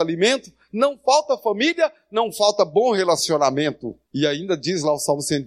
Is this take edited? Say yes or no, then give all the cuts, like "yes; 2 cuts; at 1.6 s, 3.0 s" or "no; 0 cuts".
yes; 1 cut; at 4.1 s